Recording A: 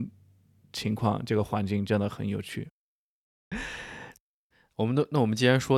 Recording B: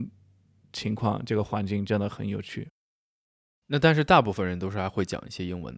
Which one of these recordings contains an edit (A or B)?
A